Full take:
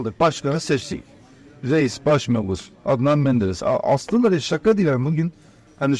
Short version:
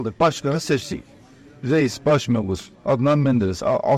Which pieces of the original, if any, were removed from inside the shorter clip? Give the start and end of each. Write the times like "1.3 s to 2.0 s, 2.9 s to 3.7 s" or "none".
none